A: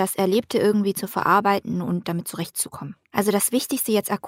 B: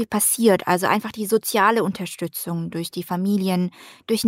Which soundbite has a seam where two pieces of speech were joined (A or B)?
A